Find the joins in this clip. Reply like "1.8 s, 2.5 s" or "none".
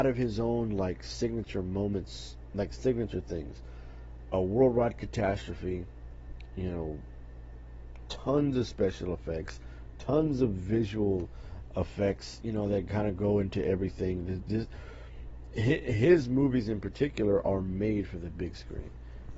none